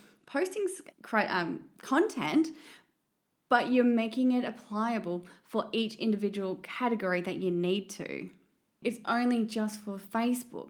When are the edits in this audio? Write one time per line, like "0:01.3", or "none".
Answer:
0:00.9
0:08.8

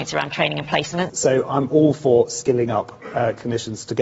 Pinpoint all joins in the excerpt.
0:01.1

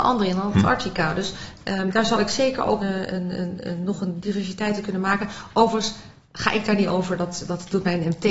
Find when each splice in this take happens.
0:02.8

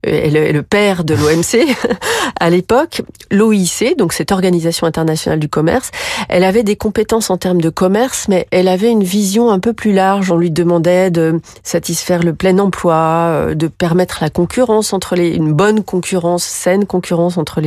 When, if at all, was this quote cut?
none

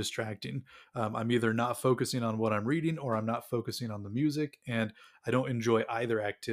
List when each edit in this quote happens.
none

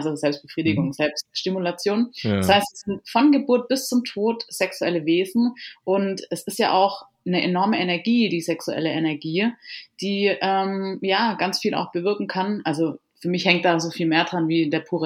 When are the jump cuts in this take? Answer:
none

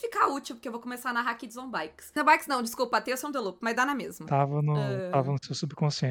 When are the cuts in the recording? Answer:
0:02.2

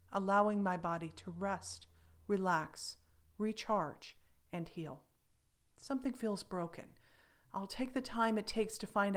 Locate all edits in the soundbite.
none

